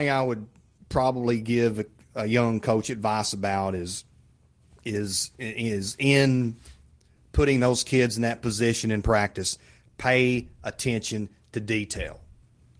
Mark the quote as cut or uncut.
uncut